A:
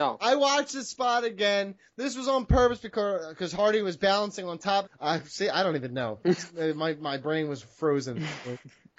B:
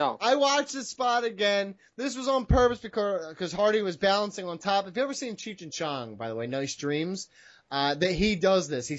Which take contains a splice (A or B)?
A